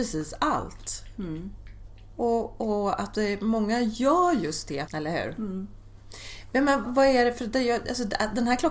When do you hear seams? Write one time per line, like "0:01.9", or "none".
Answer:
0:04.9
0:06.8

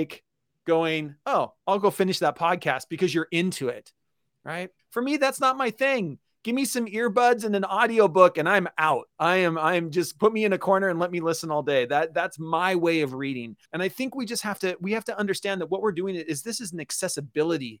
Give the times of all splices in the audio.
0:04.8
0:13.6

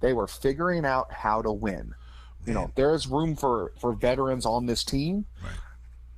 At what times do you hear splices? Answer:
0:02.5

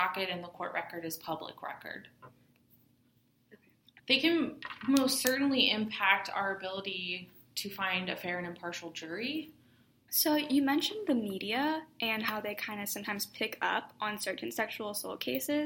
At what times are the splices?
0:04.0
0:10.1

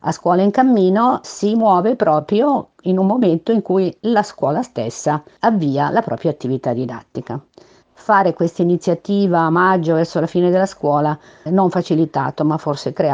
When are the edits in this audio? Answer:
0:01.2
0:07.8
0:11.5

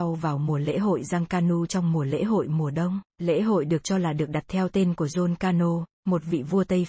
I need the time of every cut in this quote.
0:03.1

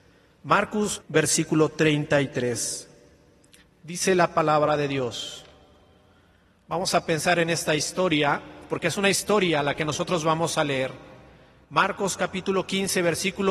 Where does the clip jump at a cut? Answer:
0:01.0

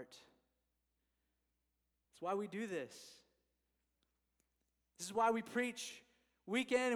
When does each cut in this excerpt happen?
0:02.0

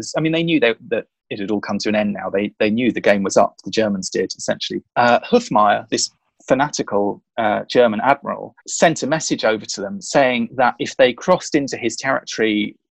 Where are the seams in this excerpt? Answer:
0:04.8
0:08.6

